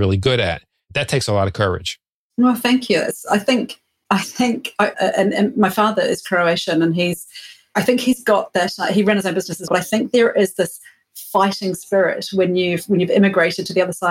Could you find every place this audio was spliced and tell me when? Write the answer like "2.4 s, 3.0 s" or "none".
4.9 s, 9.7 s